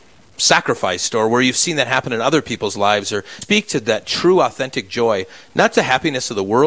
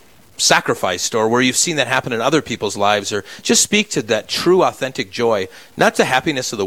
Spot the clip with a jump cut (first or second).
first